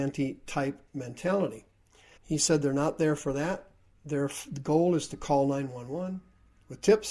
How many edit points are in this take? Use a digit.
1